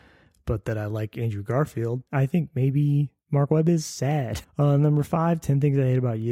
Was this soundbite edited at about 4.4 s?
yes; 2 cuts; at 2.1 s, 4.4 s

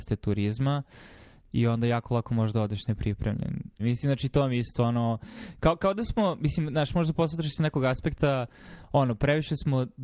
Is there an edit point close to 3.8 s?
yes; 1 cut; at 3.8 s

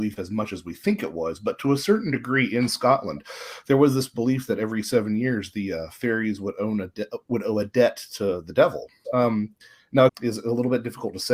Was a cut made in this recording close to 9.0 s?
yes; 2 cuts; at 9.0 s, 10.1 s

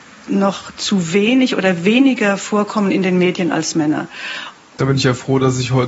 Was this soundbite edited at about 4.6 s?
yes; 1 cut; at 4.6 s

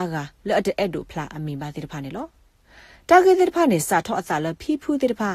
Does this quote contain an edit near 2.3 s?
no; 1 cut; at 1.1 s

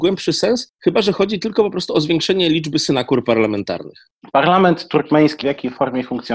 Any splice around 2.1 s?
no; 2 cuts; at 4.2 s, 5.4 s

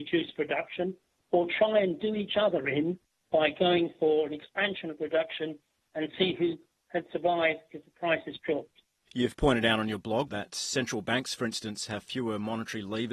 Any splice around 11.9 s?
no; 2 cuts; at 9.1 s, 10.3 s

